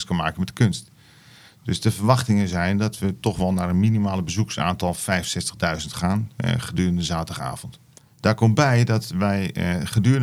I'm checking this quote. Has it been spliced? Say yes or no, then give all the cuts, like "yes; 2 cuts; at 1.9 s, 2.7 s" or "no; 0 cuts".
no; 0 cuts